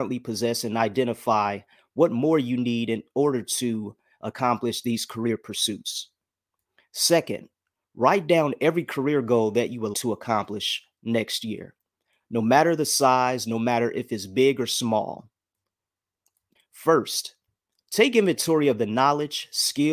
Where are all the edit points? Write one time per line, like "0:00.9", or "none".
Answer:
0:09.9
0:16.6